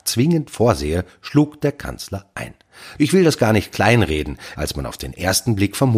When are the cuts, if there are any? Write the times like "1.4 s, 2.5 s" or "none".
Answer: 3.0 s, 4.5 s